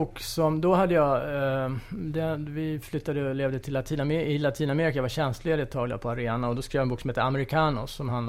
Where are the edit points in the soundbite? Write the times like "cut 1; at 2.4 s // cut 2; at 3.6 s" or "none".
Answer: none